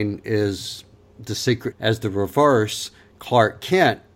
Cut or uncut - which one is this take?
cut